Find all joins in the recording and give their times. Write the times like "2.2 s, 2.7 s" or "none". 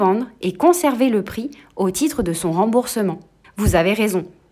3.4 s